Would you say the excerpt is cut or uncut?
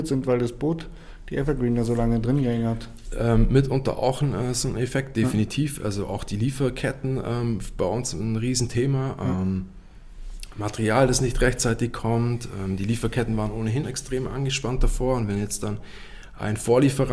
cut